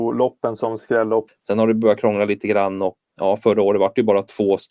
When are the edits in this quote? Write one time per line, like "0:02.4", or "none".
0:01.3
0:03.1